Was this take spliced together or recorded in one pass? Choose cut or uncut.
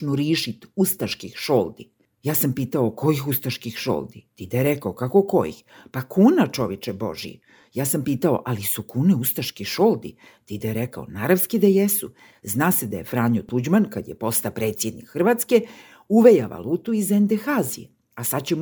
uncut